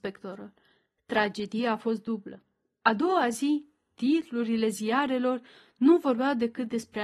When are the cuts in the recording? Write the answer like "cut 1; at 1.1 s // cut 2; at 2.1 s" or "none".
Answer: none